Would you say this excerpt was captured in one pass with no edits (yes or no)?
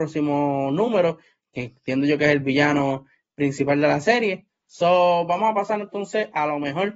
no